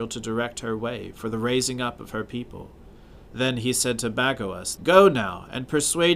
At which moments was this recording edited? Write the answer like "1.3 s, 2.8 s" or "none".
3.3 s, 4.8 s